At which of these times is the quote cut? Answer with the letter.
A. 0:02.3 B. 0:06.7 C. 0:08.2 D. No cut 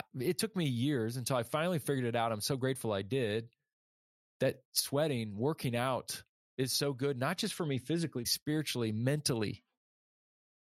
C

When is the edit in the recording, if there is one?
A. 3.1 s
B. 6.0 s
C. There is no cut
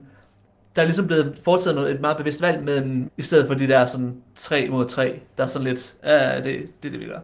A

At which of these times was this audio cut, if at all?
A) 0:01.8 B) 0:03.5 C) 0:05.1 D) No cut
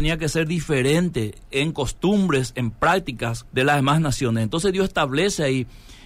B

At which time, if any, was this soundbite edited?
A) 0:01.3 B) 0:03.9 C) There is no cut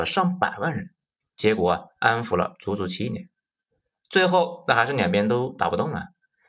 A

